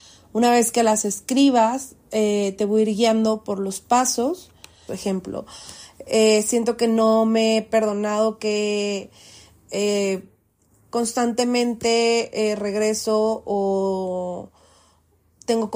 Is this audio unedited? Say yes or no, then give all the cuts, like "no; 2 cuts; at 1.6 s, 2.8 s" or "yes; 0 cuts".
no; 1 cut; at 4.9 s